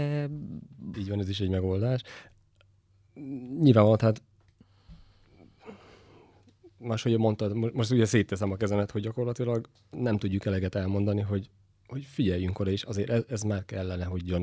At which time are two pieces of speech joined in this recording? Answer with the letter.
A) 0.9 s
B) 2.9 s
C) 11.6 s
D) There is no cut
A